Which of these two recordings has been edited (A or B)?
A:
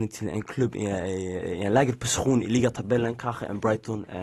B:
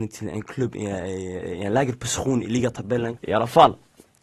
B